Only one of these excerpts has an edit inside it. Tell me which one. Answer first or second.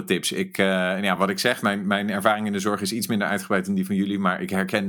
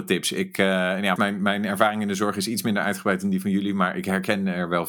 second